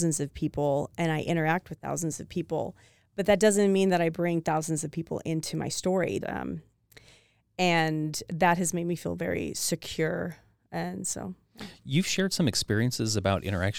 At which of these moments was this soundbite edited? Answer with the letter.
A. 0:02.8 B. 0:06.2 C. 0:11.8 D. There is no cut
B